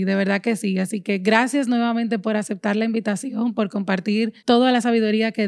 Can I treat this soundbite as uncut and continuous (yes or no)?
no